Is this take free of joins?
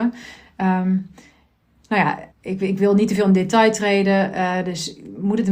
no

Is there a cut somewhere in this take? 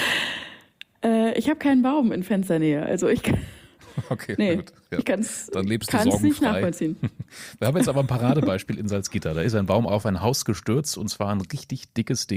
no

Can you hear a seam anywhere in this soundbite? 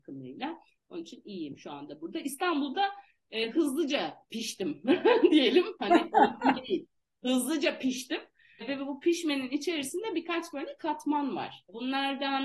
no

